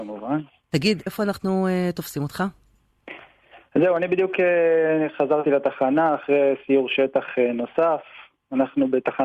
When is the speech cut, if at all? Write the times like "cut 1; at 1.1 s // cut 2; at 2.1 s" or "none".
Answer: cut 1; at 1.1 s